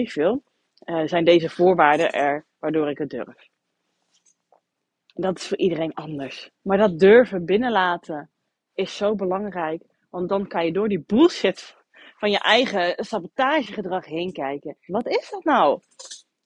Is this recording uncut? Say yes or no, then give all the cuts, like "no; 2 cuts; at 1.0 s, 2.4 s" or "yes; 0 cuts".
no; 2 cuts; at 6.6 s, 14.9 s